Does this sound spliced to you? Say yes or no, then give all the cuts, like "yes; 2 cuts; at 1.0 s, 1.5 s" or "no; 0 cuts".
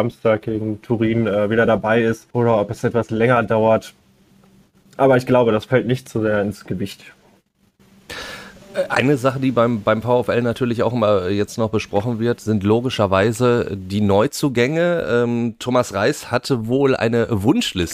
yes; 1 cut; at 2.3 s